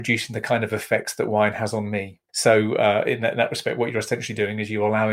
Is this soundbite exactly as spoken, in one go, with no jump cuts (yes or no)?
no